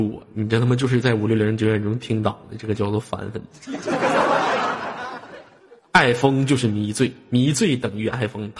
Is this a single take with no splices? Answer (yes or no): yes